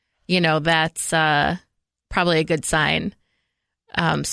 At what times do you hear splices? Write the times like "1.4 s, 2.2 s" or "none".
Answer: none

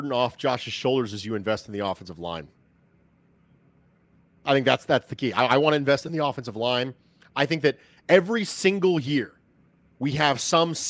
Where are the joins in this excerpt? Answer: none

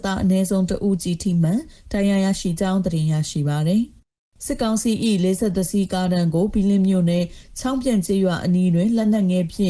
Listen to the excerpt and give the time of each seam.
none

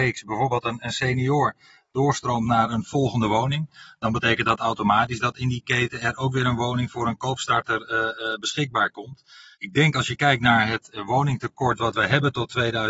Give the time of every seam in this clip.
9.5 s

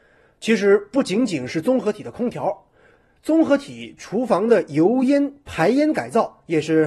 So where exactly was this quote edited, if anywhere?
none

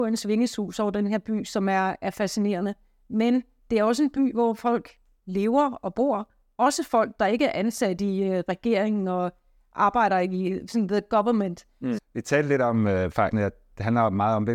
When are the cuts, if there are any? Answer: 12.0 s, 13.3 s

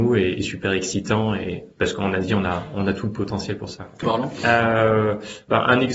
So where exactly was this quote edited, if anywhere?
4.0 s

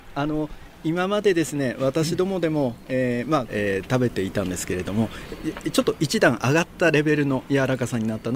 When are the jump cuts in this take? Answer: 3.5 s

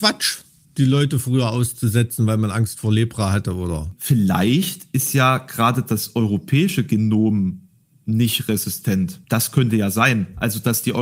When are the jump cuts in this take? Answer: none

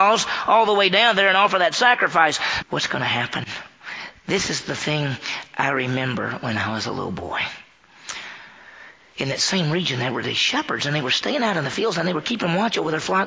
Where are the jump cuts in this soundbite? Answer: 2.6 s

